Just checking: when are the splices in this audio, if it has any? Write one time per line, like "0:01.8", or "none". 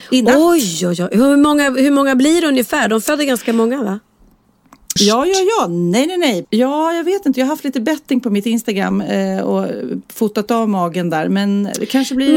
0:05.0
0:06.4